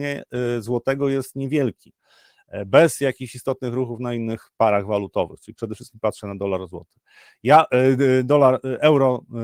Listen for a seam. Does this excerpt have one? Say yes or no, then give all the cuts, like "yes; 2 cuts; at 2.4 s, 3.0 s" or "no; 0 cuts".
no; 0 cuts